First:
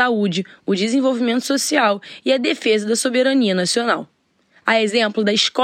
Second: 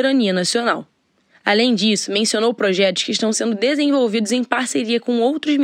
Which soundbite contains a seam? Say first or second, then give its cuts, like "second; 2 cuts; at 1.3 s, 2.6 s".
first; 1 cut; at 4.6 s